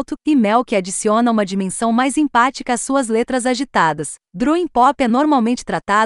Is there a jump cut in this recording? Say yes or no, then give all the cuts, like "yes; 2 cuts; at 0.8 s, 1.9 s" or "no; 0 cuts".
no; 0 cuts